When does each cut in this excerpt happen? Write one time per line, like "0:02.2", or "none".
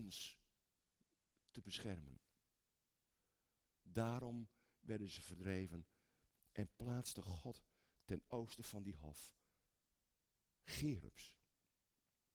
0:03.7